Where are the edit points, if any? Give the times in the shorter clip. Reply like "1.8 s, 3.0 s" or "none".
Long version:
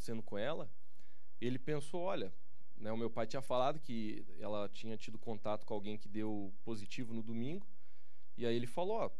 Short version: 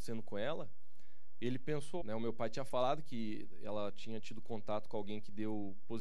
2.0 s